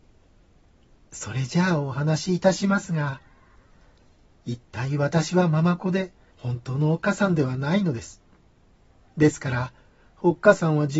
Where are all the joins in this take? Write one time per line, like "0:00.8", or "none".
0:06.3